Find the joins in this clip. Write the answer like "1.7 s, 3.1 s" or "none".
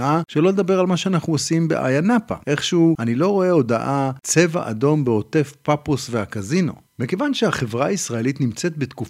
2.4 s